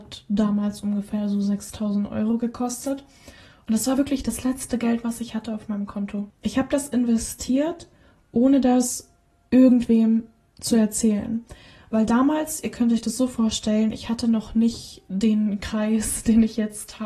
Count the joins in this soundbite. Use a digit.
0